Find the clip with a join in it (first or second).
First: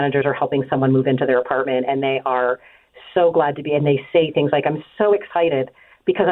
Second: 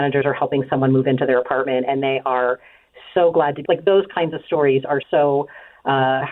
second